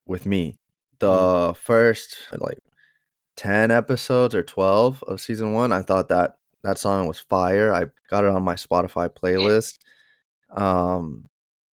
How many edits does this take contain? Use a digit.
2